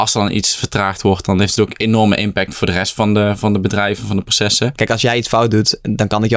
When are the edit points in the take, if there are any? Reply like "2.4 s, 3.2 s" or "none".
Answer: 4.8 s

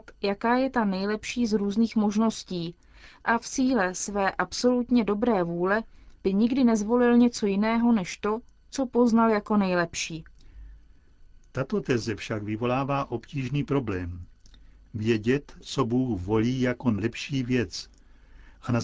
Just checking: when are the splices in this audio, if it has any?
15.6 s

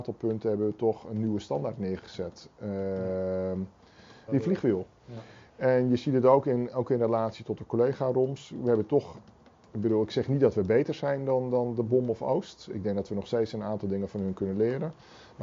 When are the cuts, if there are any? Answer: 4.3 s

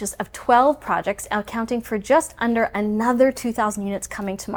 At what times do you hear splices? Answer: none

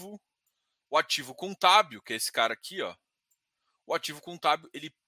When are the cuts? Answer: none

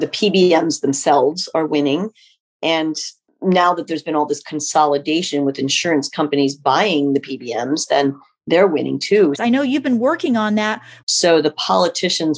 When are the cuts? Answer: 9.4 s, 11.0 s

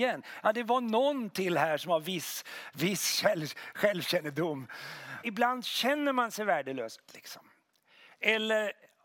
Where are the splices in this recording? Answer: 5.2 s, 7.1 s

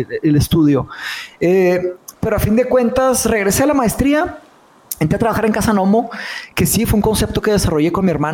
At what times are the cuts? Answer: none

